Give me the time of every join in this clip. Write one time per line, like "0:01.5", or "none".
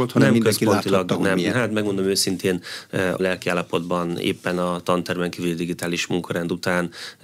0:01.5
0:03.2